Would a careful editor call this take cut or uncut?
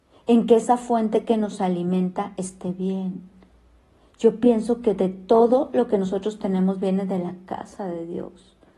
uncut